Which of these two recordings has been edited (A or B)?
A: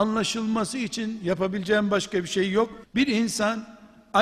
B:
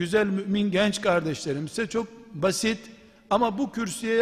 A